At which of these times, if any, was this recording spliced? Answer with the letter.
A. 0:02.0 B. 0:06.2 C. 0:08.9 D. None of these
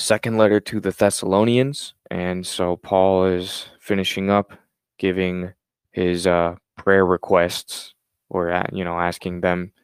A